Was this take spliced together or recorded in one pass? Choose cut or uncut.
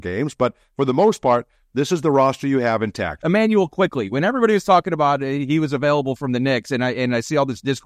cut